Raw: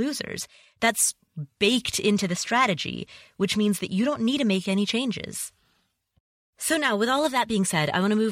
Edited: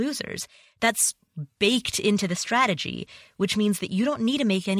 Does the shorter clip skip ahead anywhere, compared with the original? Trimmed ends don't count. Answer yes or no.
no